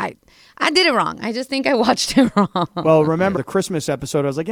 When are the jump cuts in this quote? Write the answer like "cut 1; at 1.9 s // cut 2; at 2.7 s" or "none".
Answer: cut 1; at 3.4 s